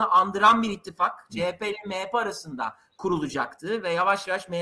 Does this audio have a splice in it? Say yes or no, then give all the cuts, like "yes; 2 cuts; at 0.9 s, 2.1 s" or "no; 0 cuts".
no; 0 cuts